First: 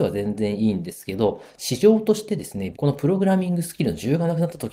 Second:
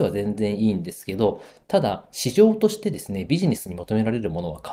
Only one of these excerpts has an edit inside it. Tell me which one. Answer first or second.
first